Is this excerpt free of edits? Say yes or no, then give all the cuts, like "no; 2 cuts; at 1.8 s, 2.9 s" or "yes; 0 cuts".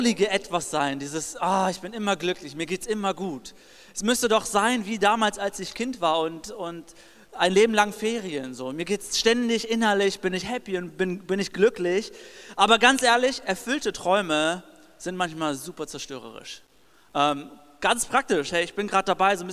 yes; 0 cuts